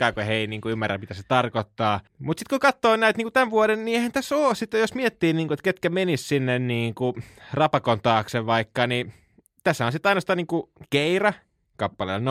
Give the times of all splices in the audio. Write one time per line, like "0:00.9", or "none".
0:02.1